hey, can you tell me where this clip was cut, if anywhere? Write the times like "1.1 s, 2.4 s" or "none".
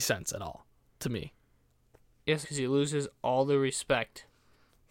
2.4 s